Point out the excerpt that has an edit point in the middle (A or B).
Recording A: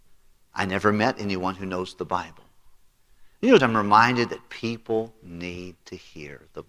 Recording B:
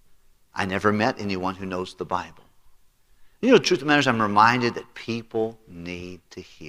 A